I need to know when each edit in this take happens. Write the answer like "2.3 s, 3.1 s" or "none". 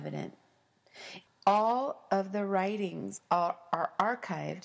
1.3 s, 3.2 s